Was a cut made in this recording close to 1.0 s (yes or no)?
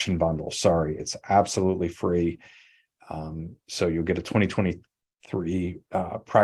yes